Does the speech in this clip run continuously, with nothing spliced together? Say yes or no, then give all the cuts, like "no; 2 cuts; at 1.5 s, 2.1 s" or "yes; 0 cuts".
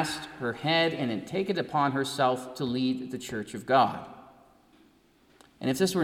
yes; 0 cuts